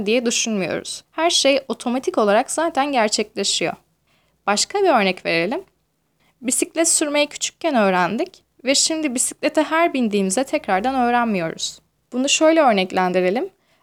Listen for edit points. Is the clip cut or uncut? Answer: cut